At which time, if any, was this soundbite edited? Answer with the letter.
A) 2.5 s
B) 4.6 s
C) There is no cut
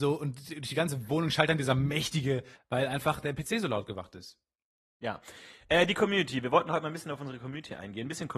A